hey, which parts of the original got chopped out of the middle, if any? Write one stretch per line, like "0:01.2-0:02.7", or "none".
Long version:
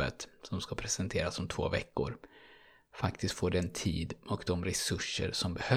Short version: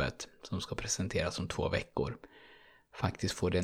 none